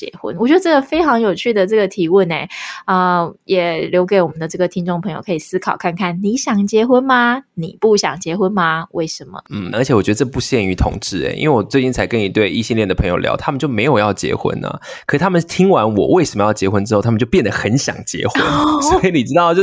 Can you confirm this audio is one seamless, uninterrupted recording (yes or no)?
no